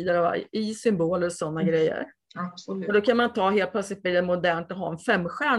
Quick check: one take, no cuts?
yes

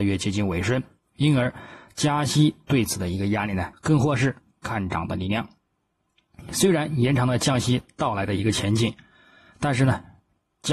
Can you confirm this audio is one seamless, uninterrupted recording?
no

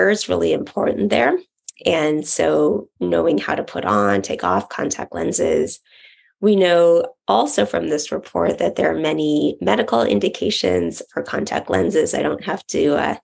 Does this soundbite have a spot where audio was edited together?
no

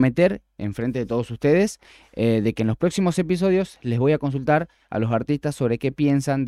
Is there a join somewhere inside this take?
no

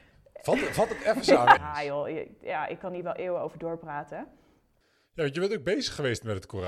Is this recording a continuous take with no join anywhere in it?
no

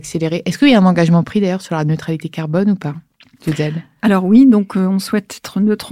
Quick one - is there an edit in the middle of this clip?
no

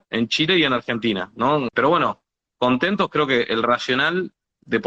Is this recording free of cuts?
no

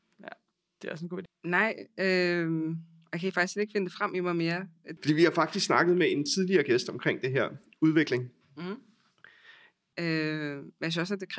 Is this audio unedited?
no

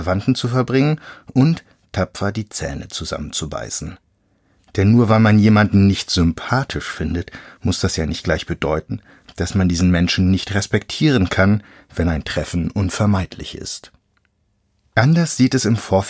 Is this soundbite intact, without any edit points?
no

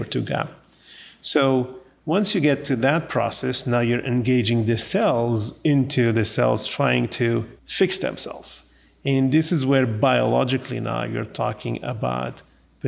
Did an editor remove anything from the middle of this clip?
yes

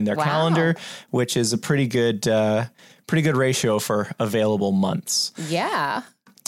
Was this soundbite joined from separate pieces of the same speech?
no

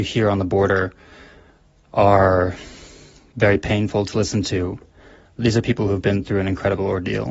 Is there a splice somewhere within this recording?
no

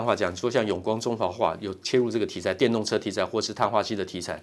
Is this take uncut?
yes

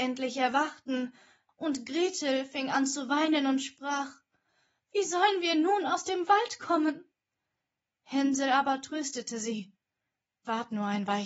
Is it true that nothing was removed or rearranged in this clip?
no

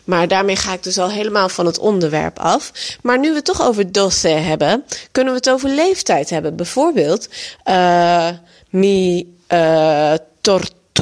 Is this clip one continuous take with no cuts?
yes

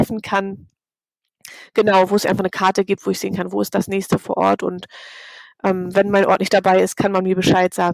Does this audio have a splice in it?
no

